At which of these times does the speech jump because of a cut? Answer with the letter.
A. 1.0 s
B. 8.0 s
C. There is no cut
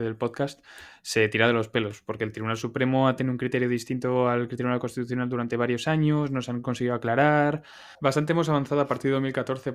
B